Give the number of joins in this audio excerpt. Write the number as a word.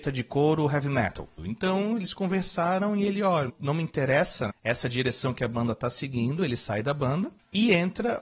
one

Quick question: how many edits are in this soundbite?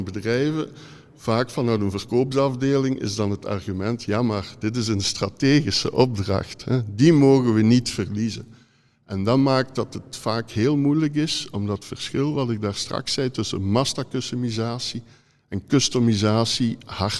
zero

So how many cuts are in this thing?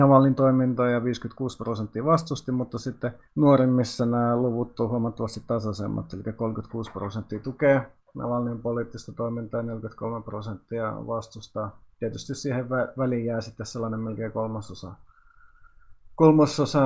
one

